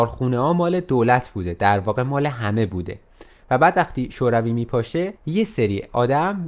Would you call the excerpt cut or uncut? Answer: cut